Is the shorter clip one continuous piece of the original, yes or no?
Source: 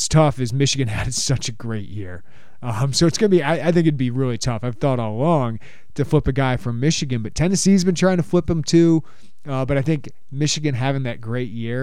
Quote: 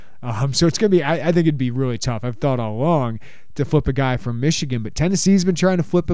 yes